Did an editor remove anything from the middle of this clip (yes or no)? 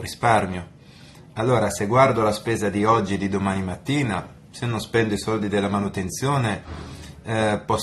no